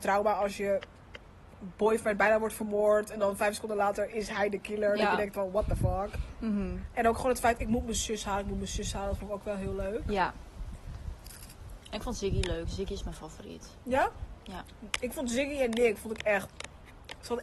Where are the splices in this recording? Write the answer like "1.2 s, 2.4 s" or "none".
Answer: none